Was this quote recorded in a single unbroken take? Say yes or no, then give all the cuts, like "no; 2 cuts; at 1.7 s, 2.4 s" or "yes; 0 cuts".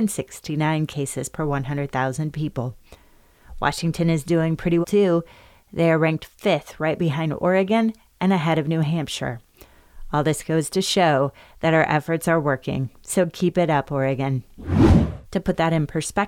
no; 2 cuts; at 4.8 s, 15.2 s